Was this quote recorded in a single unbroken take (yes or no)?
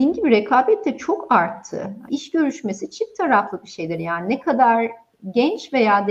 no